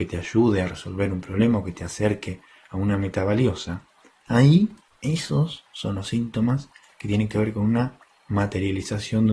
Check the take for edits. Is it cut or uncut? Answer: cut